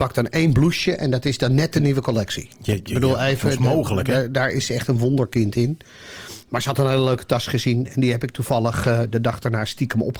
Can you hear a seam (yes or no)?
no